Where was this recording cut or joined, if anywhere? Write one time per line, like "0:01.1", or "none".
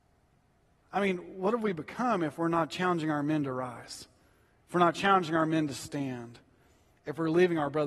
none